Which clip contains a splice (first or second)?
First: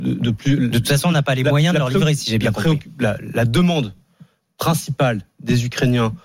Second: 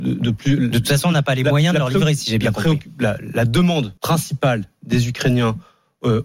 second